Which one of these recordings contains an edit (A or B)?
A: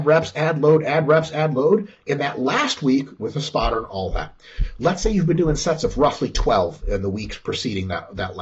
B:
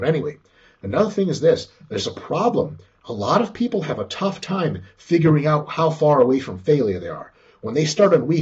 A